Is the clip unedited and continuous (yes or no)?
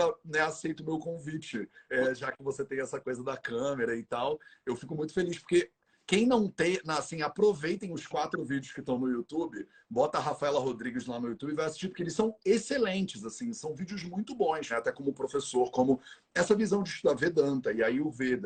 no